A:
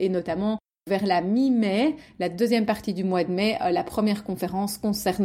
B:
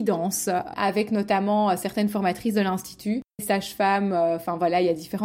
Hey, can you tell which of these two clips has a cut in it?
B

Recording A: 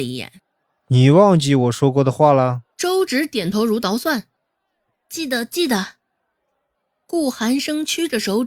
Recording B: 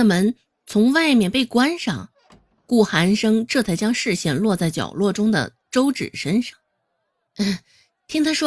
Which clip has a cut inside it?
A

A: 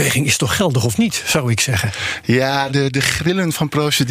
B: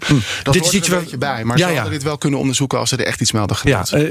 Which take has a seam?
A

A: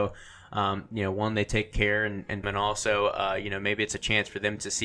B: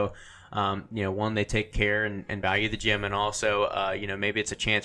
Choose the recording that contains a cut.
A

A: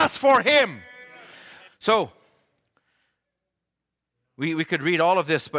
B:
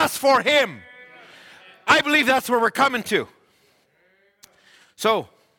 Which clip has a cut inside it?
A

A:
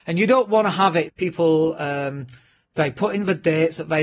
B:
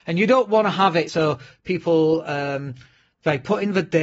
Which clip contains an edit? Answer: A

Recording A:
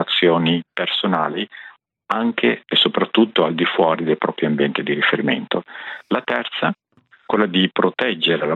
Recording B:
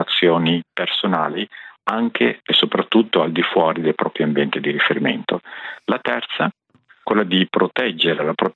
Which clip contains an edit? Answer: B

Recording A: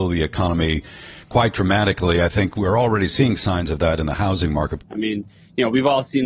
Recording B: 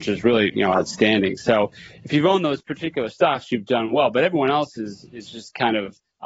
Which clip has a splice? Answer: A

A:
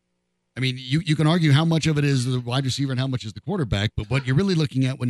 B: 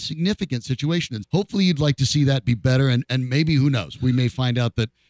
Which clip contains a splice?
B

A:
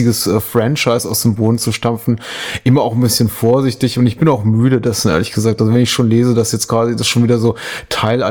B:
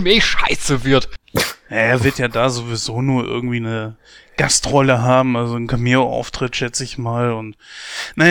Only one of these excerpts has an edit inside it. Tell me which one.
B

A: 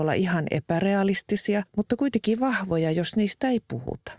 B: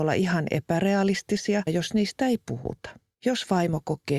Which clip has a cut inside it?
B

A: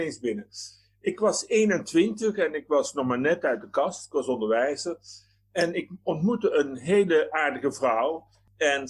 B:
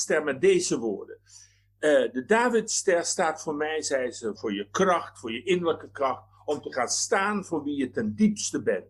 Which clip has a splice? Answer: B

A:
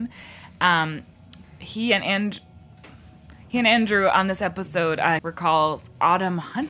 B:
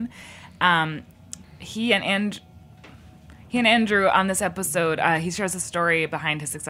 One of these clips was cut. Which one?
A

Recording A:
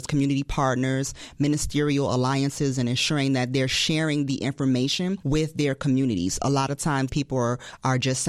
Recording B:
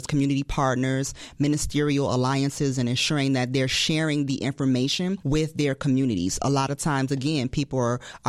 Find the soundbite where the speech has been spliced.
A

